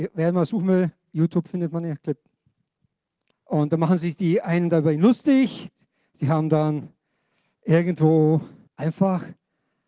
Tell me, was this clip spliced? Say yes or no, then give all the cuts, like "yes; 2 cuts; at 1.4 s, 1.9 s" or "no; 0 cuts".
yes; 2 cuts; at 3.3 s, 8.7 s